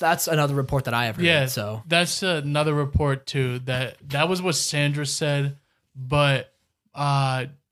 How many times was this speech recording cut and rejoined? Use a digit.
0